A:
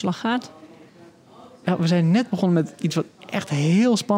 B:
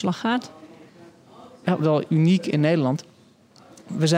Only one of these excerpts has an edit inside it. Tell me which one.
B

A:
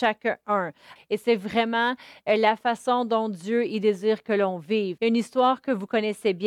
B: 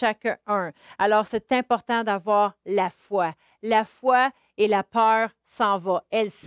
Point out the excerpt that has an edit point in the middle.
A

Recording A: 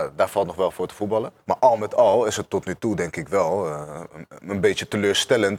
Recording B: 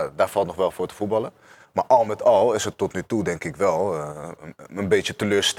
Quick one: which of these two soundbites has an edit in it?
A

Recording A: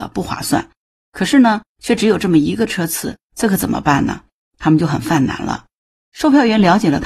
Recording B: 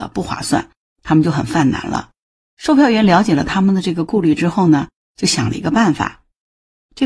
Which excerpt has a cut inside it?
B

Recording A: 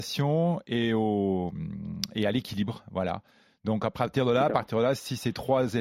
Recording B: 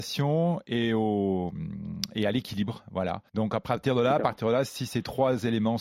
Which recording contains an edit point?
B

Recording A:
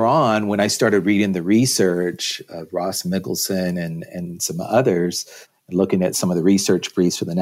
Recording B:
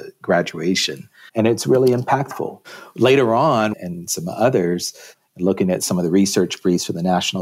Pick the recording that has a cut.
B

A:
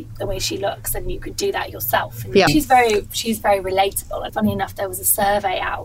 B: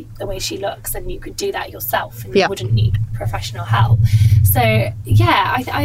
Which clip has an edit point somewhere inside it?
A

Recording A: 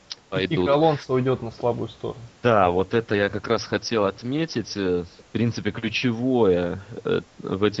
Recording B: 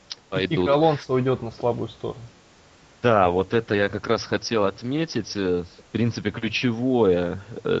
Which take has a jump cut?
A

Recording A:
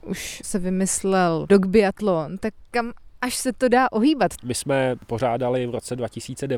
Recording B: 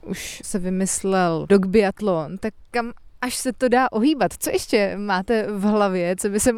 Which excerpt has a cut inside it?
A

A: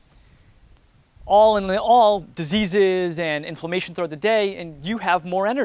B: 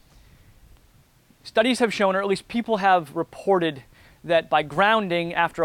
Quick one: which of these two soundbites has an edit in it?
A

